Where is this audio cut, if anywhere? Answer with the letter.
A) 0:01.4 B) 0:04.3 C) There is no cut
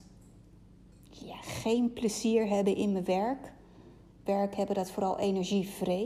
B